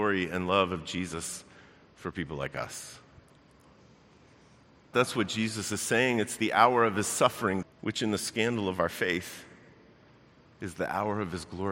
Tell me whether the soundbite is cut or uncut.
cut